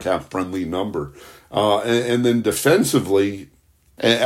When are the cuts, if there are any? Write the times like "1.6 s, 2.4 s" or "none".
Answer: none